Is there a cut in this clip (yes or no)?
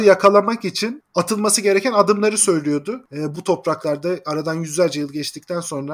yes